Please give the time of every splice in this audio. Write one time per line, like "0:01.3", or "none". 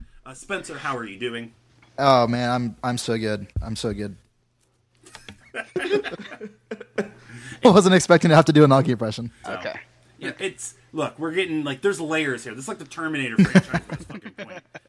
0:05.4
0:09.4